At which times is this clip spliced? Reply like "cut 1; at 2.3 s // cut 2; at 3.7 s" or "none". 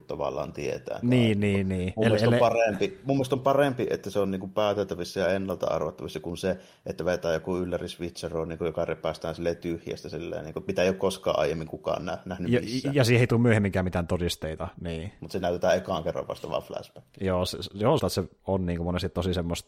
cut 1; at 1.0 s // cut 2; at 15.2 s // cut 3; at 18.0 s